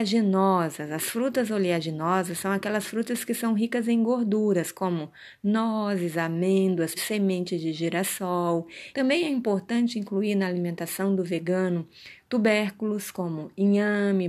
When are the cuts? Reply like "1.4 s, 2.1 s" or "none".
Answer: 7.0 s, 8.9 s